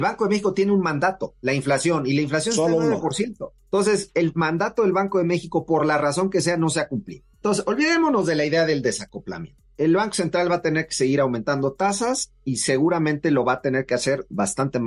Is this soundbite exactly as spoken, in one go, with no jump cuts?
yes; 0 cuts

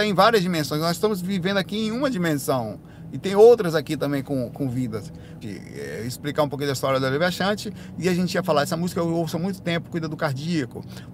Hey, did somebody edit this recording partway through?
yes; 1 cut; at 5.4 s

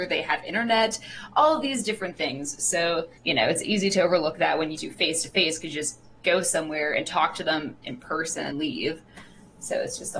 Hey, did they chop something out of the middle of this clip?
yes; 3 cuts; at 3.2 s, 4.8 s, 8.5 s

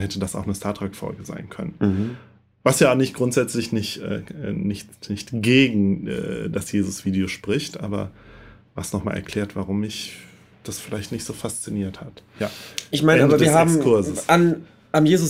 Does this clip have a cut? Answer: no; 0 cuts

